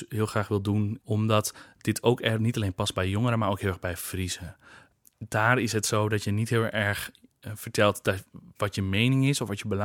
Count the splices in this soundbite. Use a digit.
1